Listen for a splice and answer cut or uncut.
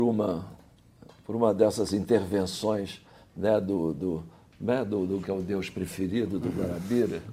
cut